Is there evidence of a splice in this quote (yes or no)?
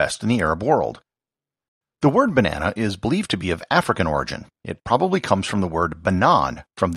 no